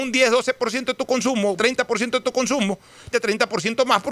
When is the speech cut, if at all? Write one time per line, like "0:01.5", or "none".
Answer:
0:01.6
0:03.1